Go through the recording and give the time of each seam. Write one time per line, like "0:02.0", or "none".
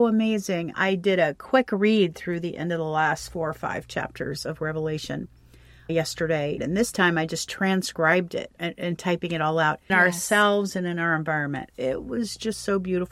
0:06.6
0:09.9